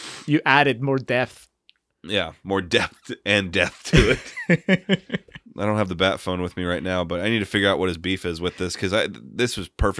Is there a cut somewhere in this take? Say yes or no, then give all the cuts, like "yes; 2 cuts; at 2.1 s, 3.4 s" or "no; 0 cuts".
yes; 1 cut; at 5.5 s